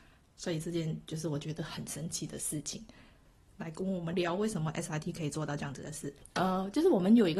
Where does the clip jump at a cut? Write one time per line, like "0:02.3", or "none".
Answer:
0:04.1
0:06.2